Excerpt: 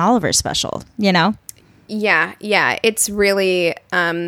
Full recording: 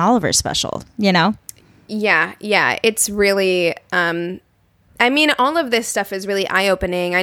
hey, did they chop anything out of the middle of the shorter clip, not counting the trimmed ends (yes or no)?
no